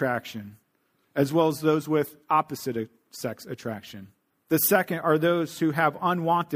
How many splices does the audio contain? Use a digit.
1